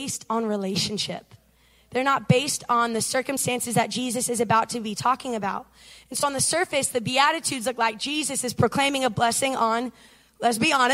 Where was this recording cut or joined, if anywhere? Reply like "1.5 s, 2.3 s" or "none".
none